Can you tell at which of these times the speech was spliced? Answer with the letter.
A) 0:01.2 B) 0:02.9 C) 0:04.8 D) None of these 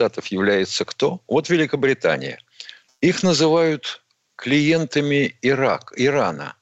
B